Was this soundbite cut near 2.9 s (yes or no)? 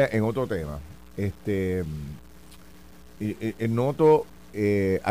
no